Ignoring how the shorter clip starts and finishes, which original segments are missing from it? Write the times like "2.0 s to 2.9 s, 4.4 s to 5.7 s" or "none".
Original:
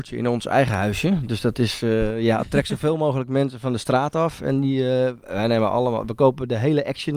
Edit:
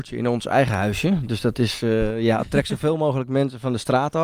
none